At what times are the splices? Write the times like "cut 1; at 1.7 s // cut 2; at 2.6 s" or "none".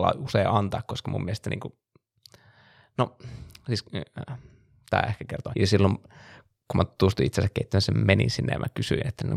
cut 1; at 5.5 s

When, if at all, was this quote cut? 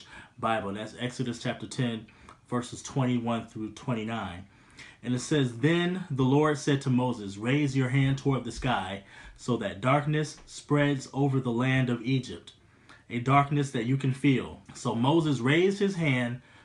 cut 1; at 14.7 s

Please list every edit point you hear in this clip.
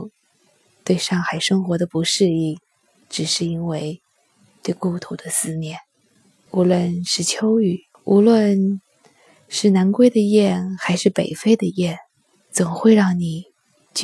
cut 1; at 6.5 s // cut 2; at 7.9 s

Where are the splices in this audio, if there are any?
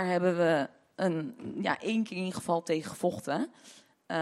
none

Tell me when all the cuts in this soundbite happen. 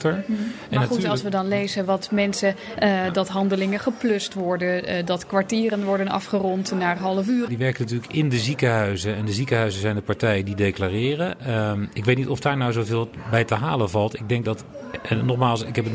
cut 1; at 2.8 s // cut 2; at 7.5 s

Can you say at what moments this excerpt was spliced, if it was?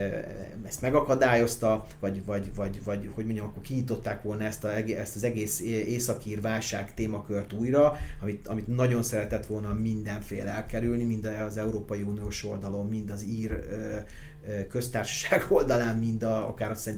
none

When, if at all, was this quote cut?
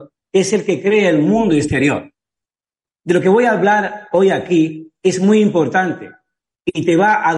cut 1; at 2.9 s

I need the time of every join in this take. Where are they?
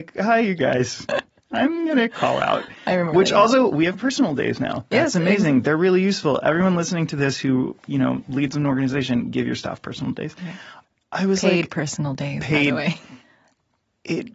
none

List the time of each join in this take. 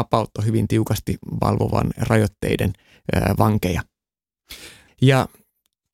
cut 1; at 4.9 s

